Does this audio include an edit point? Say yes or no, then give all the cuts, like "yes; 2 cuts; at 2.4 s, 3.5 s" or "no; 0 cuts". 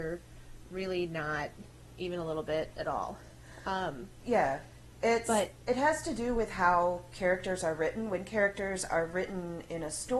no; 0 cuts